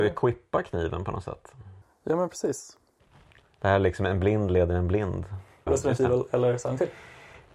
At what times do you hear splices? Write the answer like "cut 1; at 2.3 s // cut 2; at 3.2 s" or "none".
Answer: cut 1; at 5.7 s